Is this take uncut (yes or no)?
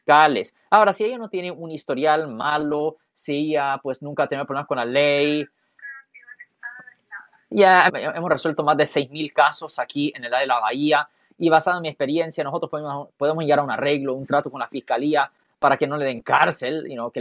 no